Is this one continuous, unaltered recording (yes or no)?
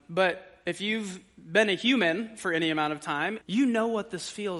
no